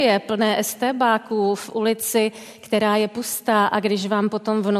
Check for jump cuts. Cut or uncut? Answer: uncut